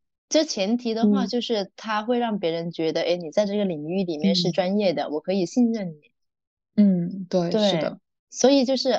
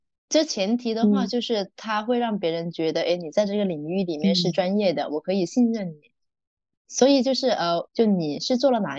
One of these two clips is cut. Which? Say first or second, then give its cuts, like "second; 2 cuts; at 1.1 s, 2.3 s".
second; 2 cuts; at 6.7 s, 7.9 s